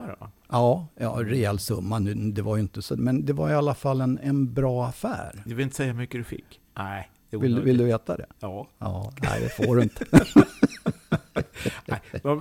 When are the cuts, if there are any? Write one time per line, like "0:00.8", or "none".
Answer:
0:06.7